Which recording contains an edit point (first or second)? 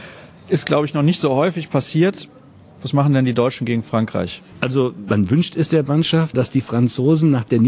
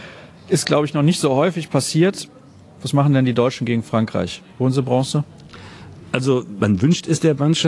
first